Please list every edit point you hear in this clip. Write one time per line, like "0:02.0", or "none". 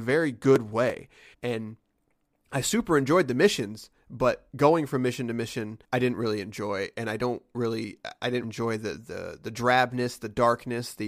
0:01.3
0:05.8
0:08.4